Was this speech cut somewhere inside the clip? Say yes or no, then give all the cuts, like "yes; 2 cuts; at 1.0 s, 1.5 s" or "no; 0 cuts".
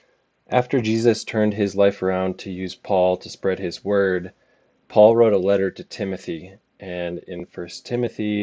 no; 0 cuts